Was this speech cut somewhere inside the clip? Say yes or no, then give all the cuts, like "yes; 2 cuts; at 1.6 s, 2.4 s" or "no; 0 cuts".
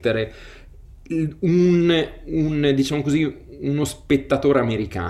no; 0 cuts